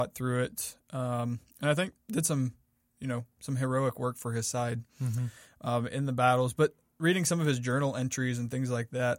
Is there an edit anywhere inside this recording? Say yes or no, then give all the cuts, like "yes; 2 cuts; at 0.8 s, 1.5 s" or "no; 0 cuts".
no; 0 cuts